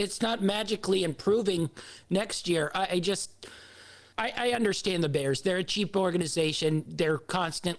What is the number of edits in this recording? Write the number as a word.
one